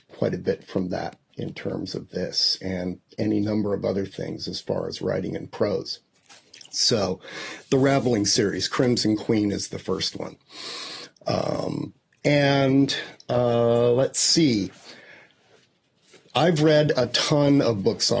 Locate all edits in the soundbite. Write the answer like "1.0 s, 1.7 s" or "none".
none